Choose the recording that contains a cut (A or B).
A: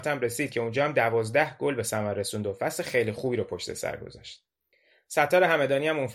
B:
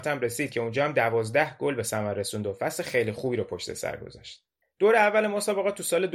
B